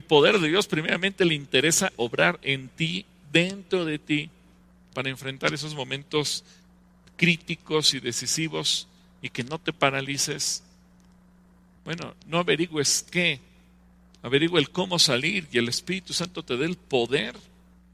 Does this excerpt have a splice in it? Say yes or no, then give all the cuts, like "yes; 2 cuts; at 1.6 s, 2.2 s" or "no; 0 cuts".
yes; 1 cut; at 11.8 s